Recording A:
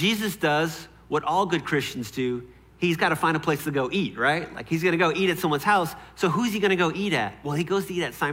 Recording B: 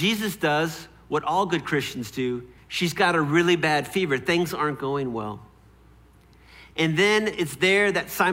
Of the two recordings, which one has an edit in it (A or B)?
B